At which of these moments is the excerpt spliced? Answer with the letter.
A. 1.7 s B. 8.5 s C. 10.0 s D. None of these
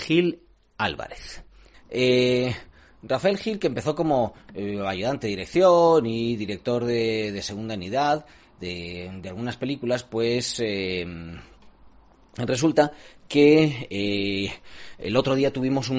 A